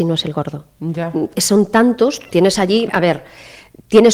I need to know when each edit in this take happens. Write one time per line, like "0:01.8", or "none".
0:01.3
0:02.9